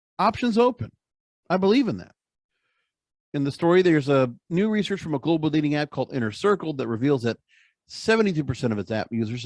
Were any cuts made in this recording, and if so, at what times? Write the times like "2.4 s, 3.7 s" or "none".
none